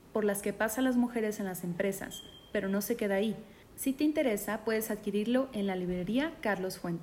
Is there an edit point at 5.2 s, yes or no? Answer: no